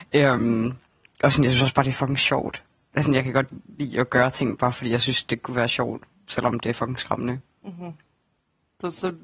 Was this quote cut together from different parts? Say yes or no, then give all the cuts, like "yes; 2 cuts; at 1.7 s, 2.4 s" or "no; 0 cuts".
no; 0 cuts